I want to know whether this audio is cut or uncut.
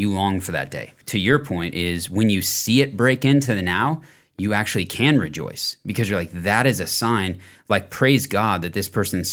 cut